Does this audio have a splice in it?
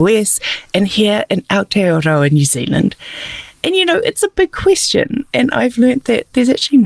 no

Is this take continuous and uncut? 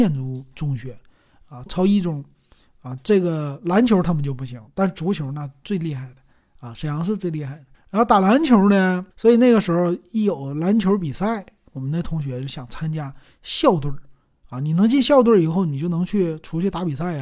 no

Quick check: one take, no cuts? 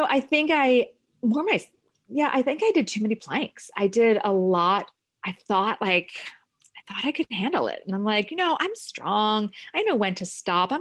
yes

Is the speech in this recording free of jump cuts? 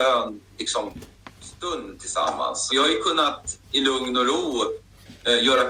no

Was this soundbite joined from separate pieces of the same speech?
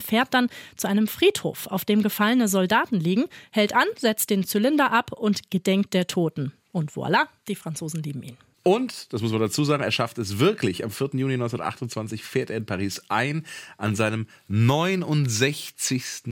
no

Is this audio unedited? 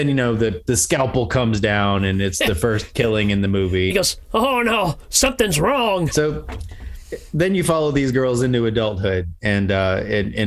no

